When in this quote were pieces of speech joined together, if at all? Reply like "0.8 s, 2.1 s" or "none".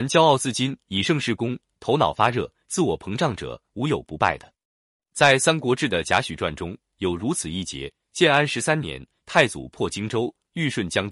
5.0 s